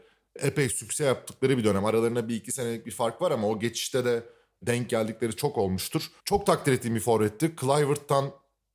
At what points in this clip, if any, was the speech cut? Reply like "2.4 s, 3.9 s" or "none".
6.2 s